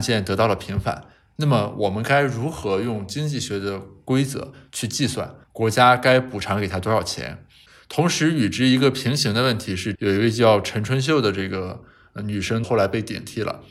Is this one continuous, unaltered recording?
no; 2 cuts; at 9.9 s, 12.6 s

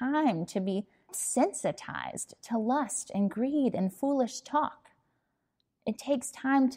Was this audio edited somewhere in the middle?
yes; 1 cut; at 1.1 s

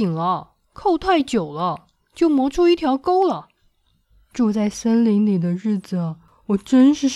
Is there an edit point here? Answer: yes; 1 cut; at 4.3 s

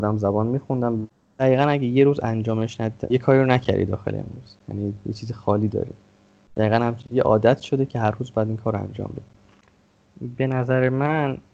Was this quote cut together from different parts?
yes; 1 cut; at 3.1 s

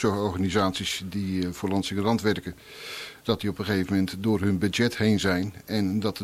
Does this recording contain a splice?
no; 0 cuts

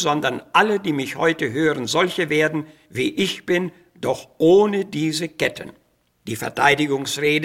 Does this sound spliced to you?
no; 0 cuts

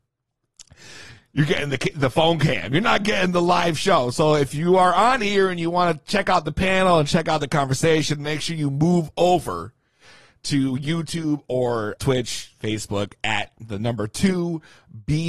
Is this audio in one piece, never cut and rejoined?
no; 1 cut; at 12.0 s

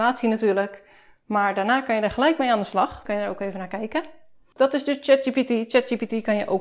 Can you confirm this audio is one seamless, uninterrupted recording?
no; 1 cut; at 3.0 s

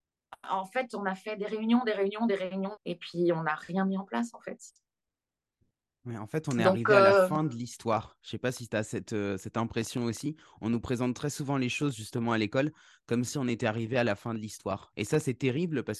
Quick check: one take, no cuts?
no; 2 cuts; at 2.8 s, 14.9 s

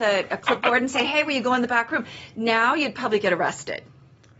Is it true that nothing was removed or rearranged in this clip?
yes; 0 cuts

